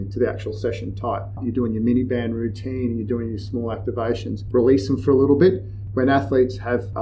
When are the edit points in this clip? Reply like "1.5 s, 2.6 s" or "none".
1.4 s, 4.5 s, 5.9 s